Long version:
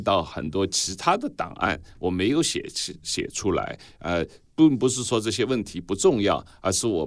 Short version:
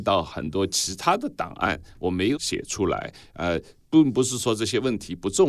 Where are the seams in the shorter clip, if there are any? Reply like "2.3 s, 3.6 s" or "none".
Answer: 2.3 s